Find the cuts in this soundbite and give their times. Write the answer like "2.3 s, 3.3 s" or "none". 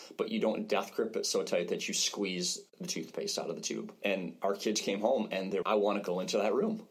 4.0 s, 5.6 s